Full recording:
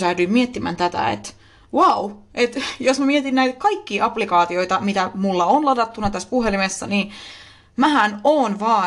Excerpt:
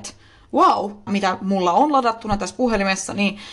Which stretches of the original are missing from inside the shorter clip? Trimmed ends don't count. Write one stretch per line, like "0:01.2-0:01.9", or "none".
0:02.3-0:04.8